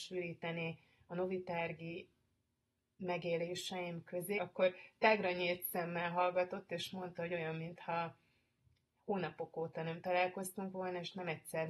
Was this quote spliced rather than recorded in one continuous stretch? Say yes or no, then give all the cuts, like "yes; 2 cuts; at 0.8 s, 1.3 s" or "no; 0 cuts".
yes; 1 cut; at 4.4 s